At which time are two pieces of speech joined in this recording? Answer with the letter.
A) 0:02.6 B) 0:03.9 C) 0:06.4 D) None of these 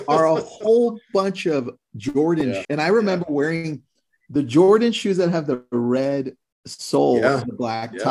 A